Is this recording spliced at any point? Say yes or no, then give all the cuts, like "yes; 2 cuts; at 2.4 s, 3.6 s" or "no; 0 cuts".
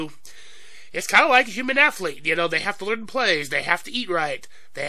no; 0 cuts